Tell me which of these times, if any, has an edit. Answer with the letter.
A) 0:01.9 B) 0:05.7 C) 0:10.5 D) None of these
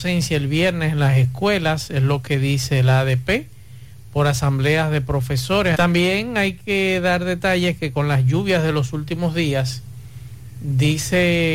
B